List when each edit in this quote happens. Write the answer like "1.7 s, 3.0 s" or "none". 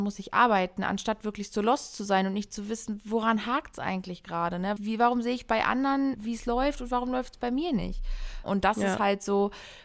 4.8 s, 6.1 s, 8.4 s